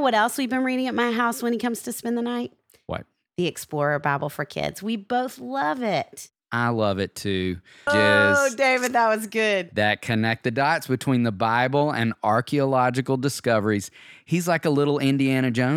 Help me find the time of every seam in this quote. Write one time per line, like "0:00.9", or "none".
0:07.9